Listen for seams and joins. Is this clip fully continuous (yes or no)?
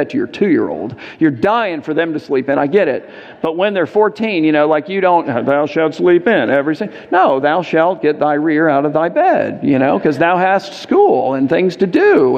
yes